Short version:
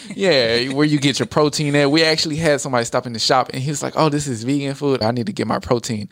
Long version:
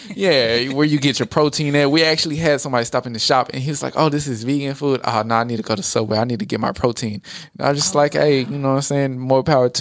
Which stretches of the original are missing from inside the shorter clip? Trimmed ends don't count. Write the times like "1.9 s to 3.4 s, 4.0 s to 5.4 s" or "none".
5.0 s to 6.1 s